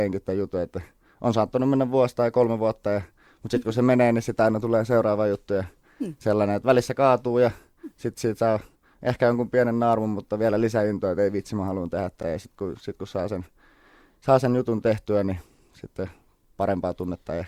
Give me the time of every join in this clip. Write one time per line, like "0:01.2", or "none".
none